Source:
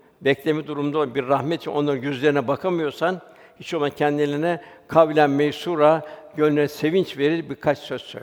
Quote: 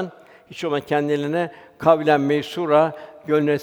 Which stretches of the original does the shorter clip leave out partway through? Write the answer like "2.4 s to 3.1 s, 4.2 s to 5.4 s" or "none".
none

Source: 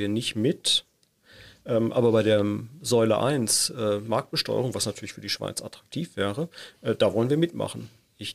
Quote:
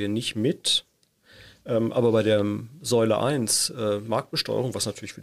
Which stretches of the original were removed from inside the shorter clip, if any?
none

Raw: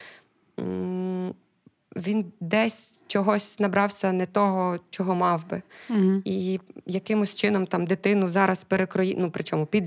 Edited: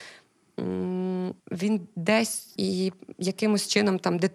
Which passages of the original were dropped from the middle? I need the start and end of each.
1.4 s to 1.8 s, 3.0 s to 6.2 s

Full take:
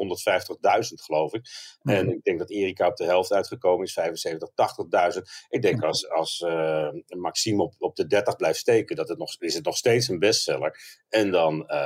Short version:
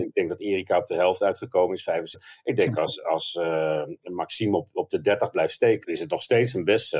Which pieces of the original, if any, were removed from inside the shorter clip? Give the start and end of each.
4.2 s to 5.2 s, 8.9 s to 9.4 s

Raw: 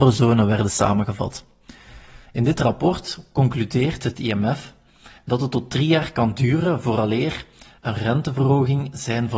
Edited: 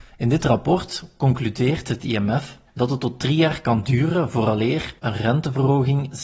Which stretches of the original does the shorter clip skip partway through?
4.8 s to 5.2 s, 7.5 s to 7.8 s

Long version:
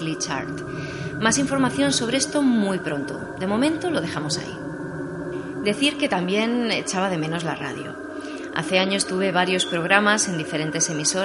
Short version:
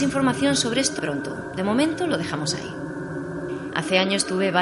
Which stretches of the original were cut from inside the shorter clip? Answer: 2.4 s to 2.8 s, 5.6 s to 8.5 s

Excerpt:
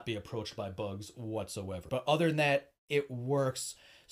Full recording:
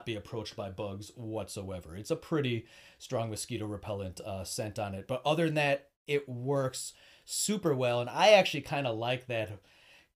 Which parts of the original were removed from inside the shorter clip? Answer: 1.9 s to 5.1 s

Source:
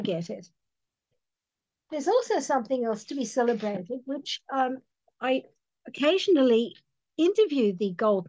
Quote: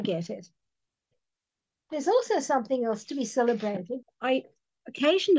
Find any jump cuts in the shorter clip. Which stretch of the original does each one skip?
4.0 s to 5.0 s

